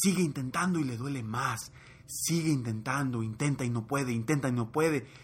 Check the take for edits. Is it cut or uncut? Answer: uncut